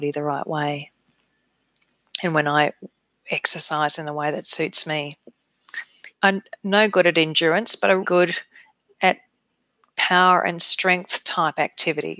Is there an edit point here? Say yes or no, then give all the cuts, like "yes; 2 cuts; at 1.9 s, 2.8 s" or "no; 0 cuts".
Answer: yes; 2 cuts; at 6.1 s, 8.0 s